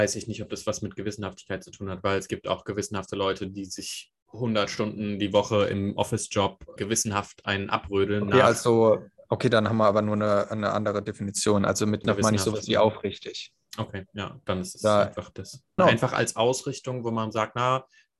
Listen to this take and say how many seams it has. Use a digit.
3